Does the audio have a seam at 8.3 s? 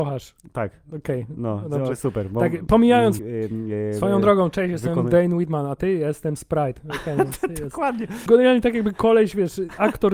yes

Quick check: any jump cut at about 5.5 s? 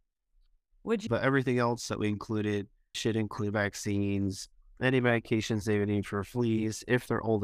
no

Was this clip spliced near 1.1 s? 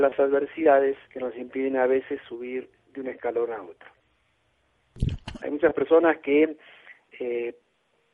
yes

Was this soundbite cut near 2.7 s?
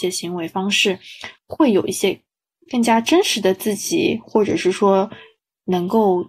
yes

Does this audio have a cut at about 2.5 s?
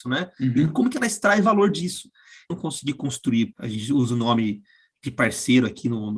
yes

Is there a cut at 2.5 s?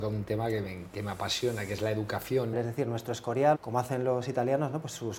yes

